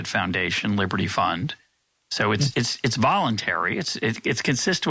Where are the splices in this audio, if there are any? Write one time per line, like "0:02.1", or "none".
none